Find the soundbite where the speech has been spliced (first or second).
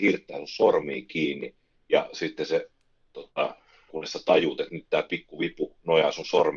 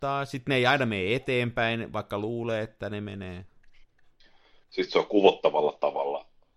first